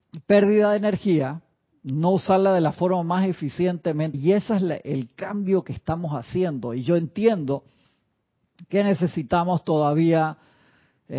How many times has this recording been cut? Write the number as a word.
one